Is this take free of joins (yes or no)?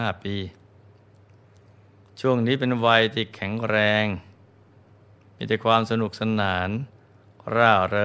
yes